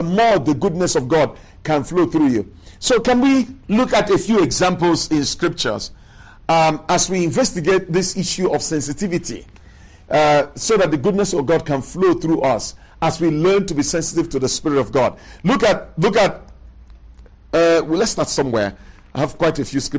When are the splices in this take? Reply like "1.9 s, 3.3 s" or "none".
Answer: 3.6 s